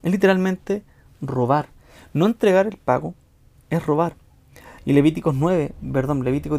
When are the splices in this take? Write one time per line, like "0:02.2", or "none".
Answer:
0:04.8